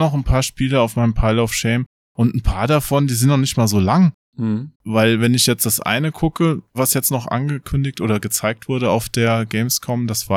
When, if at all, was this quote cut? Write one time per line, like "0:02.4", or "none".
0:04.7